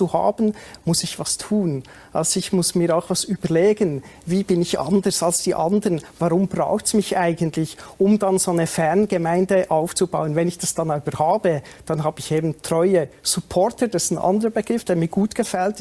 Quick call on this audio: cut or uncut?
uncut